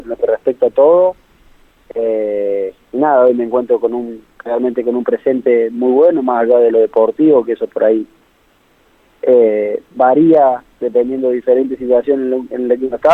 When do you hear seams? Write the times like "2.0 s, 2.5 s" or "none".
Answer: none